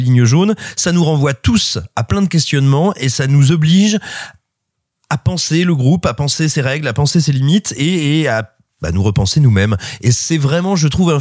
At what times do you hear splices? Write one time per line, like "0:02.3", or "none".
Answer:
none